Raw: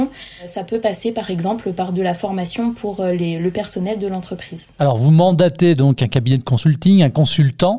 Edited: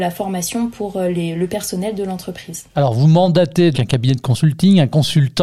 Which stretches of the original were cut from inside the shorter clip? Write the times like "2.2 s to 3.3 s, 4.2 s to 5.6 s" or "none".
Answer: 5.8 s to 6.0 s